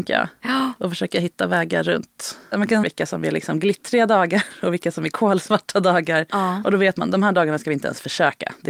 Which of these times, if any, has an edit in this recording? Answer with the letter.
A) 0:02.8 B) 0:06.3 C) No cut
A